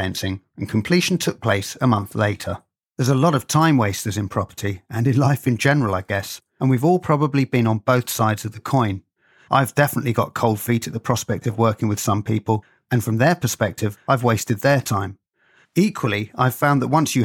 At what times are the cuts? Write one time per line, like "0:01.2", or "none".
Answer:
0:02.8